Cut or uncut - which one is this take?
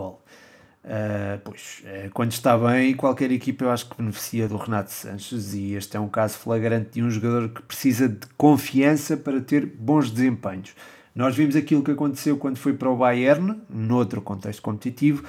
cut